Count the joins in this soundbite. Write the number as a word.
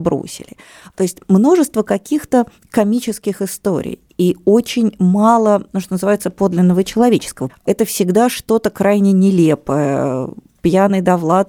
one